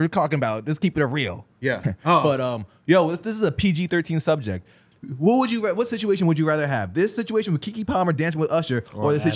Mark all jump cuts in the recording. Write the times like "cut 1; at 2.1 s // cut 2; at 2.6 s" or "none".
cut 1; at 1.8 s